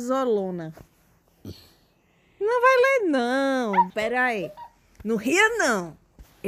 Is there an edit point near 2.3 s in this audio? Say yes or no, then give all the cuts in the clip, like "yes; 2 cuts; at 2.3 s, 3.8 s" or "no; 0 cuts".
no; 1 cut; at 3.9 s